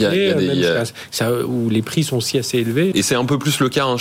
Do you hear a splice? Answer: yes; 1 cut; at 2.9 s

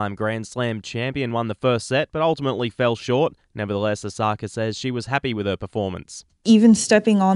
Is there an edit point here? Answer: no; 0 cuts

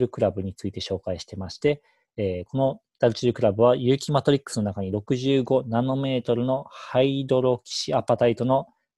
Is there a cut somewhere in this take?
no; 0 cuts

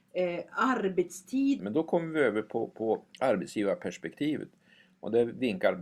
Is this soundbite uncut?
no; 1 cut; at 1.6 s

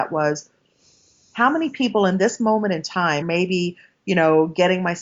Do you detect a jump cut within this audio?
yes; 1 cut; at 3.2 s

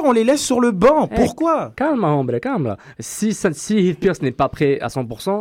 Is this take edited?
yes; 1 cut; at 3.0 s

